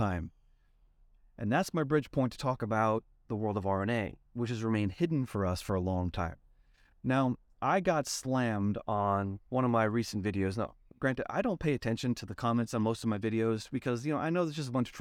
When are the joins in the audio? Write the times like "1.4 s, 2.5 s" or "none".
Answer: 4.3 s